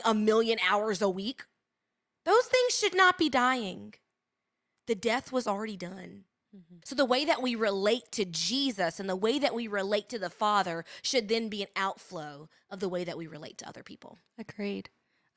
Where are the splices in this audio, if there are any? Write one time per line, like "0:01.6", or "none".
0:06.8